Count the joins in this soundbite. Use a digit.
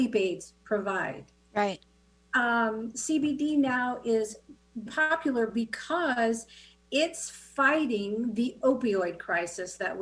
1